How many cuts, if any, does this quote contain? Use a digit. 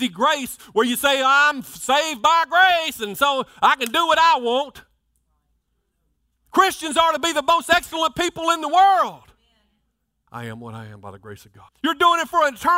2